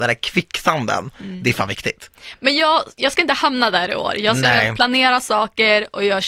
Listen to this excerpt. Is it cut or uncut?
uncut